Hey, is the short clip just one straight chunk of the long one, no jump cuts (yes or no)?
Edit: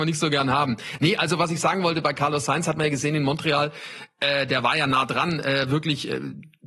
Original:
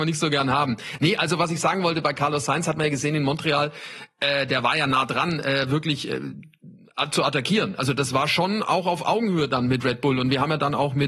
yes